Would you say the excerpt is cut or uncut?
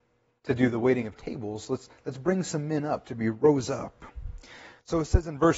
uncut